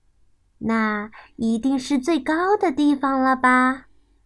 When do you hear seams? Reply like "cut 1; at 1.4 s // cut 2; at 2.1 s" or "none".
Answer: none